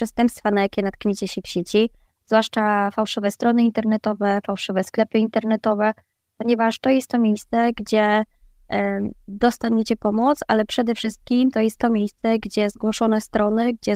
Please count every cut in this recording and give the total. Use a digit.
0